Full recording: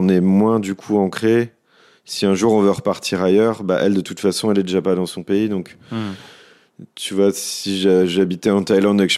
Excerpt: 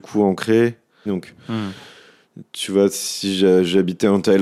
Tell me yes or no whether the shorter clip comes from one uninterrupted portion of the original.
no